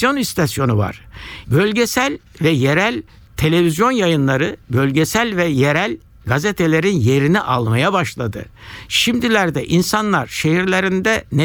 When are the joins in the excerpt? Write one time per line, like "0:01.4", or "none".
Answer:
0:01.4

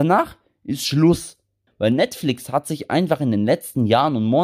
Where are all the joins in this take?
0:01.7

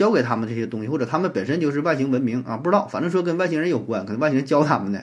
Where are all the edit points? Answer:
none

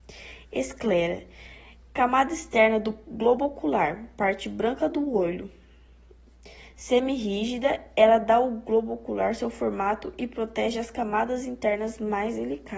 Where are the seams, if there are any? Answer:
none

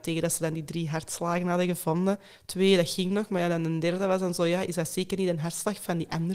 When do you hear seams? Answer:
none

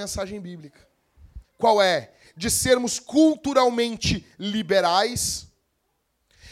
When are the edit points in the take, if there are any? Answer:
0:01.4

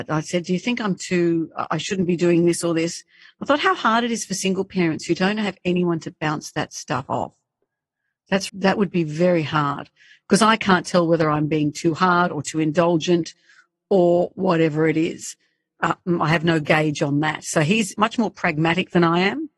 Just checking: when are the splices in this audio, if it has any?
0:08.5

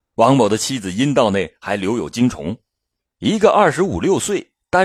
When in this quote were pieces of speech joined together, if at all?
0:03.1

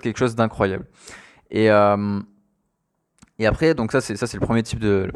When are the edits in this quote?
none

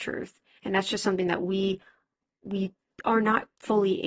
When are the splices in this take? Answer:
none

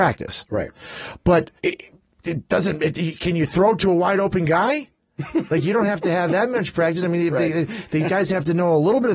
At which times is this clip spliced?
0:01.6

